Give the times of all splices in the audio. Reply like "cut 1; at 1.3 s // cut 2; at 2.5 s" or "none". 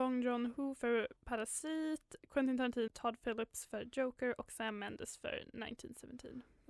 cut 1; at 1.2 s // cut 2; at 2.9 s